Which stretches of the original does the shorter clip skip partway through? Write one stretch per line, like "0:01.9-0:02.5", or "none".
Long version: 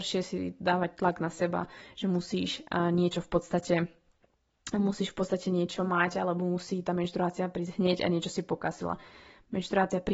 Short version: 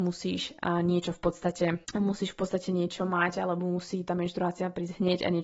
0:03.9-0:04.6